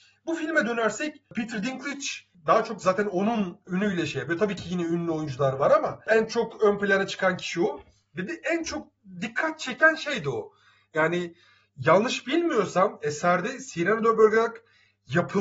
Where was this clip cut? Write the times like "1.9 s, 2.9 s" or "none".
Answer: none